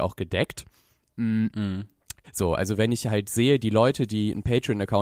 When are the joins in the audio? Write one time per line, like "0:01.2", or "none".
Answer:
0:02.2